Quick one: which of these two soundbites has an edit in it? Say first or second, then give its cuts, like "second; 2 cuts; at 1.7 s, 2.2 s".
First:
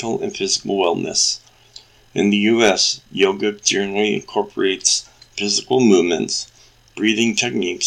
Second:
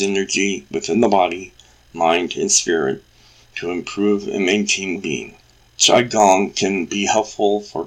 second; 1 cut; at 4.9 s